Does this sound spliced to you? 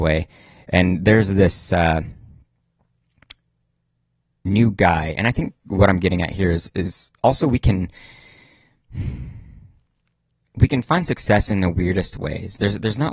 no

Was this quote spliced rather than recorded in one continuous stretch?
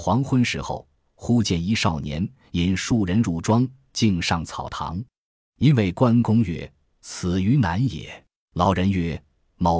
yes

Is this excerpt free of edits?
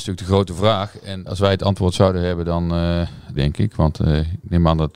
no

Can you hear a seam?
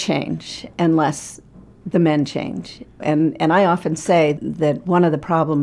yes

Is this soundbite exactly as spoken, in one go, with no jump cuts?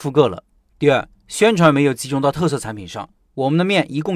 no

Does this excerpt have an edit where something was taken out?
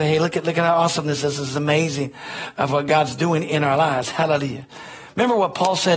no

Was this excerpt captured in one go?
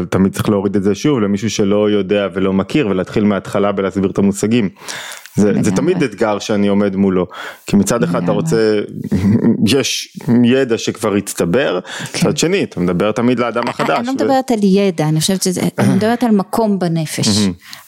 yes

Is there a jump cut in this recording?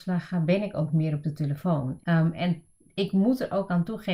yes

